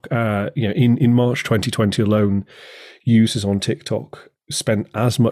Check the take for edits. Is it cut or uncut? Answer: uncut